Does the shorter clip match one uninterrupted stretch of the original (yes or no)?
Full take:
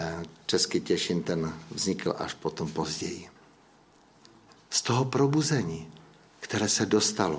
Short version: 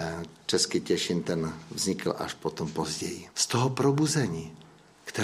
no